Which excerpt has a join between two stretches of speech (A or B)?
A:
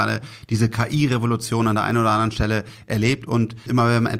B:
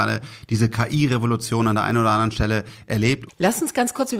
B